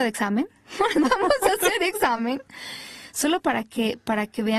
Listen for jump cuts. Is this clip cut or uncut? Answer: uncut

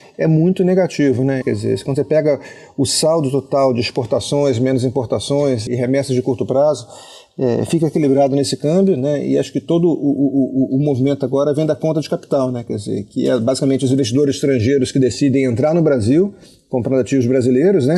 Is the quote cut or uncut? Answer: cut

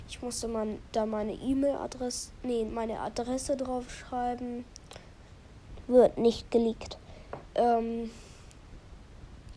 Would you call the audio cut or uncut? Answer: cut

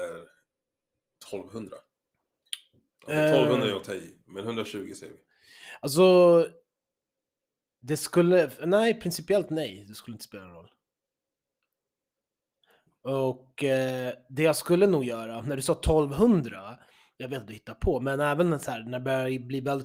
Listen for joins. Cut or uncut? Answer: uncut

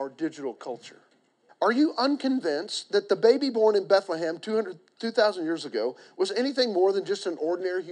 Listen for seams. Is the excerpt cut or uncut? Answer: cut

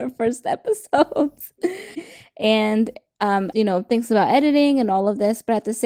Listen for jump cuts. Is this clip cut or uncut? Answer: cut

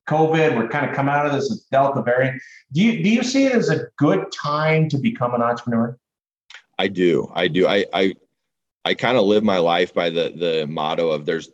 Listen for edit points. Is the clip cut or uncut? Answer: uncut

